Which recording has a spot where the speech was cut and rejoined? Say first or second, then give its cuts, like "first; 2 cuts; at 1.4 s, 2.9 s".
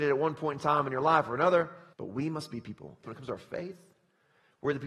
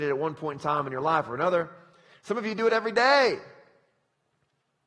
first; 2 cuts; at 1.9 s, 3.0 s